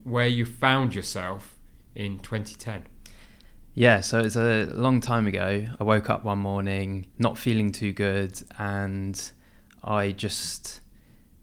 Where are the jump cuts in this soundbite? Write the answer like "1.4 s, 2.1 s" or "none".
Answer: 5.8 s, 7.1 s